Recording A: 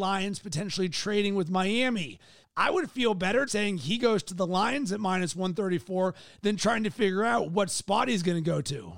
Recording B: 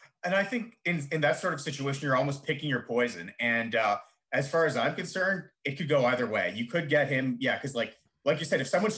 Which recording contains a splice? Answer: A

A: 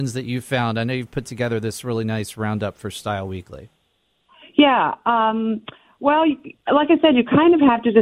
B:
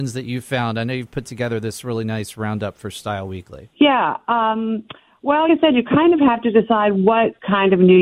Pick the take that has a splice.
B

